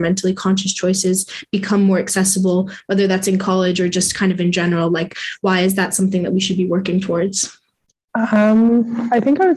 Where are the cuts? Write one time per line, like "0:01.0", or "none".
none